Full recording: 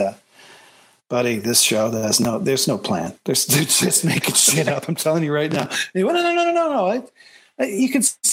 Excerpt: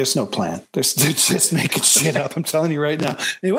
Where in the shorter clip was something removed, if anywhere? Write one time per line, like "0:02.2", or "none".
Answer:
none